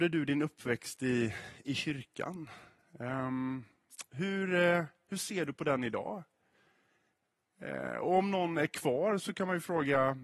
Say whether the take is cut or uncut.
uncut